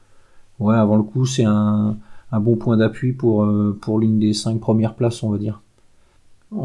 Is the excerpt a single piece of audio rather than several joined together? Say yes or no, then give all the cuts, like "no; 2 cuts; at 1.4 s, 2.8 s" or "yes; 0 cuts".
yes; 0 cuts